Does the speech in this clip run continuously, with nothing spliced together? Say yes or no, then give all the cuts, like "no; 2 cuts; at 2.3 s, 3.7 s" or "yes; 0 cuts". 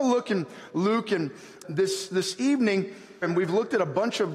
no; 2 cuts; at 1.6 s, 3.2 s